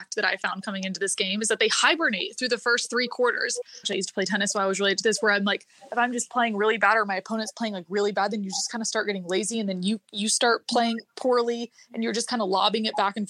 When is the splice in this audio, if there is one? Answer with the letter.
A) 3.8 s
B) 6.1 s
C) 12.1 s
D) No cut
A